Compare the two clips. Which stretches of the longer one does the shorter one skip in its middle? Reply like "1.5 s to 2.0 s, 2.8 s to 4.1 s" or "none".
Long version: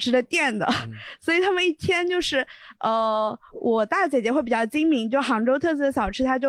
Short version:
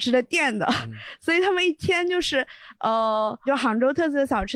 3.5 s to 5.1 s